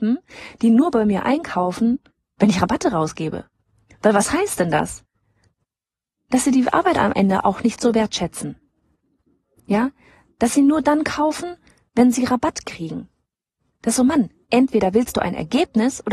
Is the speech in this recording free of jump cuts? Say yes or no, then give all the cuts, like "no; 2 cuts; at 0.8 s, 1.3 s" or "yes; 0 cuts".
yes; 0 cuts